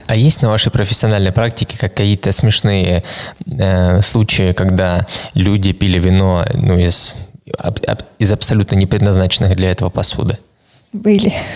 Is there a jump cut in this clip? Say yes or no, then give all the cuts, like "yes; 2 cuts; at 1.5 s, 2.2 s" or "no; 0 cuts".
no; 0 cuts